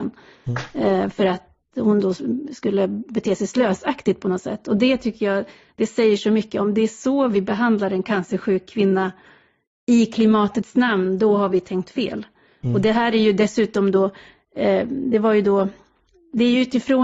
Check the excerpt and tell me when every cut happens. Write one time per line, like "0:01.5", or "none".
none